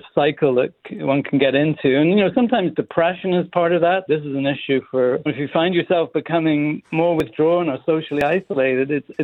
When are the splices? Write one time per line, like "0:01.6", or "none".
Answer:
0:04.1
0:05.3